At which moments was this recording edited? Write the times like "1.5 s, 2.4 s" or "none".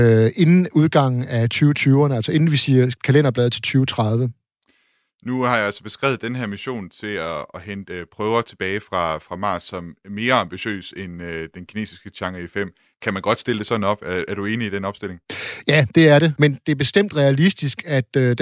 3.0 s, 16.4 s